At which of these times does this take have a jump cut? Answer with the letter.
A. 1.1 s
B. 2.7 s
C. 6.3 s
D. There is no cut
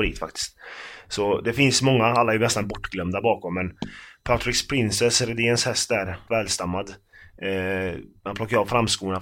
C